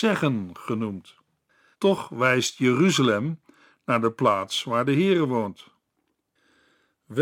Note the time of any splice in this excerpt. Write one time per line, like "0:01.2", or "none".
0:01.7